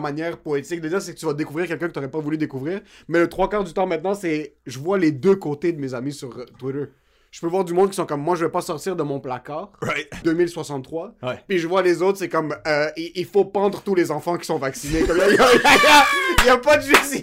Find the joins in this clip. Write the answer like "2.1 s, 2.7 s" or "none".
10.2 s